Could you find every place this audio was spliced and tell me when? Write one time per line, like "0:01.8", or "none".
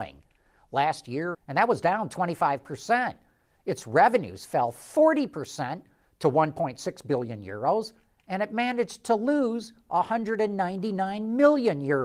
0:01.3

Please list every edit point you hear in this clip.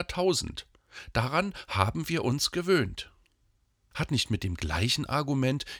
0:03.9

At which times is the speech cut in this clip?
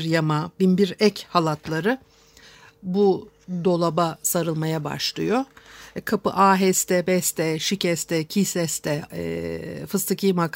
0:09.1

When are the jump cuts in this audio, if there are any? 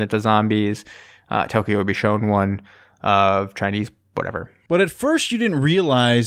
0:04.7

